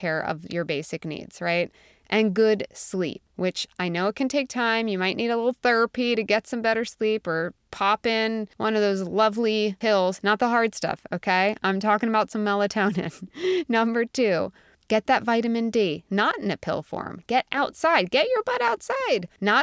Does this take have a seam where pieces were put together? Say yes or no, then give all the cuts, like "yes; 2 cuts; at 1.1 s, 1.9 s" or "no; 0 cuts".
no; 0 cuts